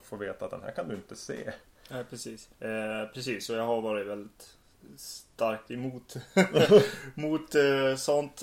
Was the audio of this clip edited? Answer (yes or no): yes